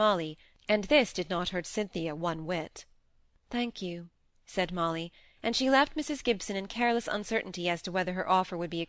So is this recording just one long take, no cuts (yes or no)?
no